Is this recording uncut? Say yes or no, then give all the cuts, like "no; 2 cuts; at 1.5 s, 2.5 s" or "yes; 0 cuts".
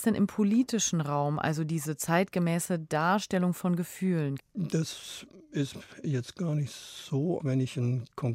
no; 2 cuts; at 4.4 s, 7.4 s